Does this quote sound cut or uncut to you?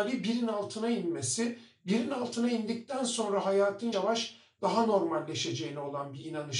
cut